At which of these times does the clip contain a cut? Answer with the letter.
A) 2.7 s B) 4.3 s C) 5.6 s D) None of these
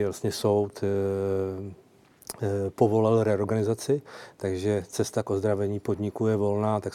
D